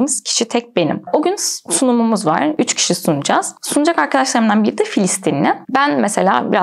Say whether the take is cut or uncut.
cut